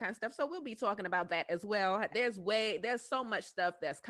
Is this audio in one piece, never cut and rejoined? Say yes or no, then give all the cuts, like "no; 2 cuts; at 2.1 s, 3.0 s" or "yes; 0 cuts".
no; 1 cut; at 2.1 s